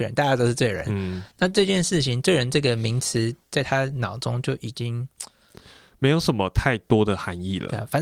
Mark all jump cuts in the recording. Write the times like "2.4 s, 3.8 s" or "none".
none